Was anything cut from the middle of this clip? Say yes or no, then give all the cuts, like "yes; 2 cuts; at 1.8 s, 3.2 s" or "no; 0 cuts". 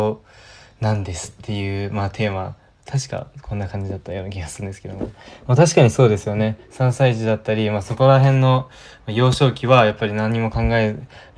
no; 0 cuts